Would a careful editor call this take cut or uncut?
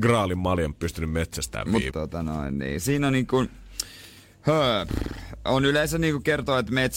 cut